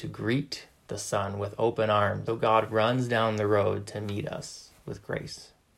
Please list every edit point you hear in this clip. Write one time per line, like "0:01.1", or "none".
0:02.3